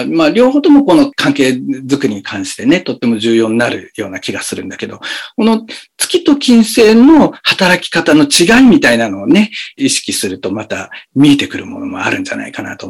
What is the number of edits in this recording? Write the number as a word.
zero